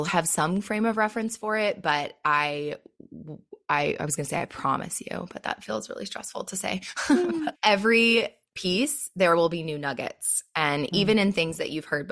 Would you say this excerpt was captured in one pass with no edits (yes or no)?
no